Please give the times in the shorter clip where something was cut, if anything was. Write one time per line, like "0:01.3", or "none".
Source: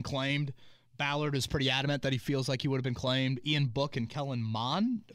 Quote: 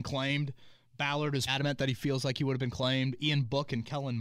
0:01.5

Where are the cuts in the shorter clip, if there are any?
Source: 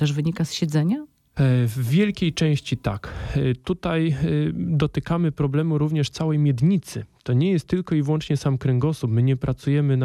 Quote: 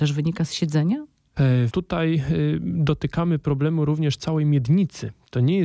0:01.7

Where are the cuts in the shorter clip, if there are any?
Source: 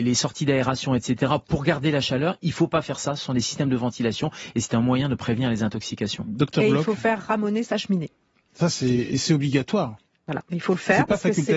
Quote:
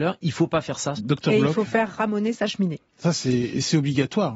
0:01.0
0:02.9

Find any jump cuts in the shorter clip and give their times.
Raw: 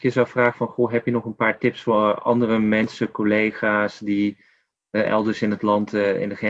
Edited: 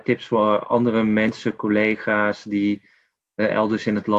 none

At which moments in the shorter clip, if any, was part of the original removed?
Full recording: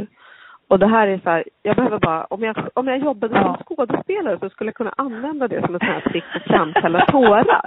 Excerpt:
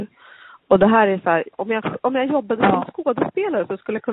0:01.5

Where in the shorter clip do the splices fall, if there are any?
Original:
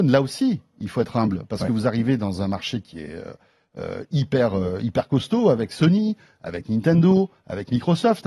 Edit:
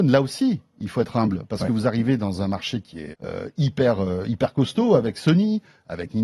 0:03.1

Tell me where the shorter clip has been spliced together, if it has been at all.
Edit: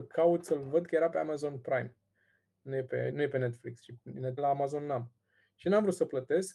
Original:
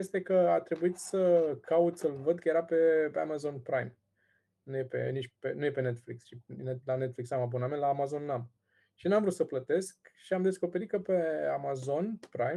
0:01.1
0:03.1
0:04.4

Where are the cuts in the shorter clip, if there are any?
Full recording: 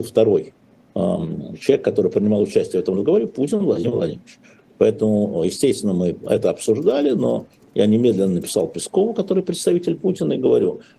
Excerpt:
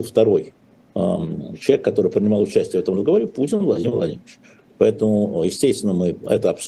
none

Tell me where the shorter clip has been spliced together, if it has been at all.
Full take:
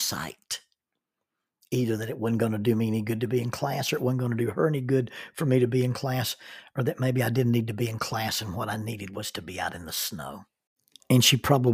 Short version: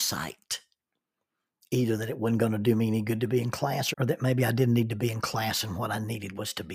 0:03.9

